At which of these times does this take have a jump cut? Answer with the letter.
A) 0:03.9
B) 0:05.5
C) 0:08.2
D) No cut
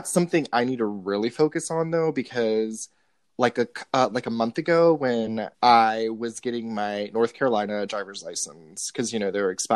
B